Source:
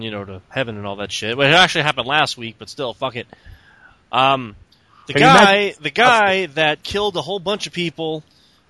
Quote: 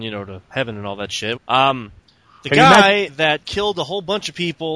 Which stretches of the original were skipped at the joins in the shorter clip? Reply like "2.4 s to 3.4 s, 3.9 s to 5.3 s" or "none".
1.4 s to 4.0 s, 5.7 s to 6.5 s